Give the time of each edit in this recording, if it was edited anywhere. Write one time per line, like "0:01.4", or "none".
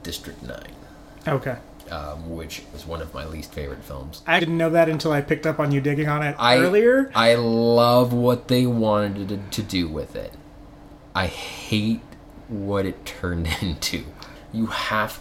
0:02.7
0:04.4